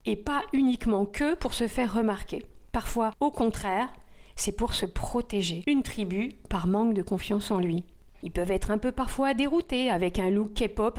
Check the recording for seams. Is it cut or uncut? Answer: cut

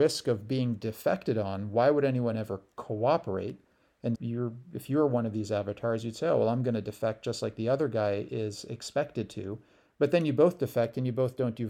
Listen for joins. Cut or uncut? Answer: cut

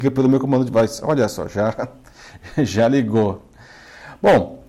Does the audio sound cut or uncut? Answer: uncut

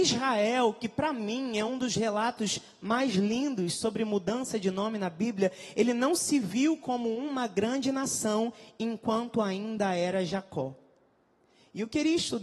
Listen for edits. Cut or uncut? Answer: uncut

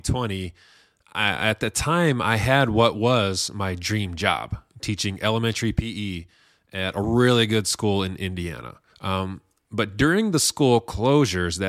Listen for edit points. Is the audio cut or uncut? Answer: cut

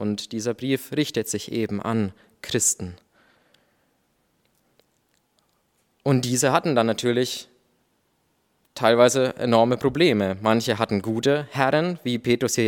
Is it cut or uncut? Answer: uncut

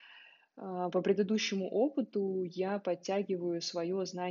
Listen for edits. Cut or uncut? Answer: uncut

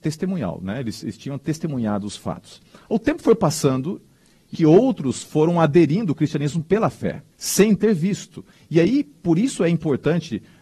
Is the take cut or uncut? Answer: cut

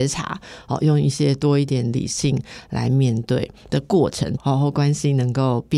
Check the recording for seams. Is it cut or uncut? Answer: cut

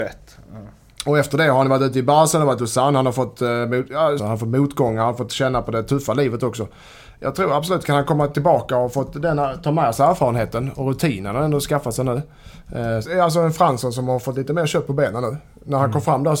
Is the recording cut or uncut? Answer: cut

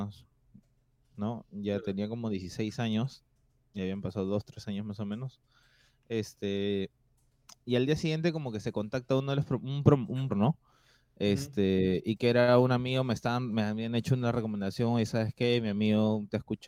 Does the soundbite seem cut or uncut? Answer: cut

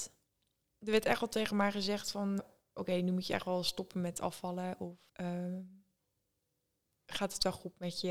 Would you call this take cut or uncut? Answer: cut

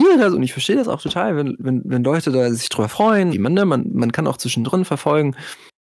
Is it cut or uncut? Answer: cut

